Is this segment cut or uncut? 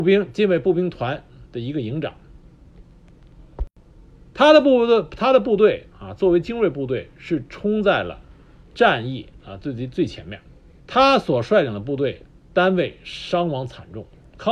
cut